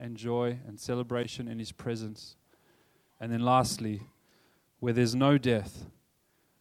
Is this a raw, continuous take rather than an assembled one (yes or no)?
no